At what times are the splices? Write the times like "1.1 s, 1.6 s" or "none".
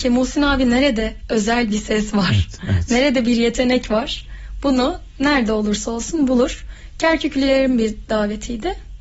none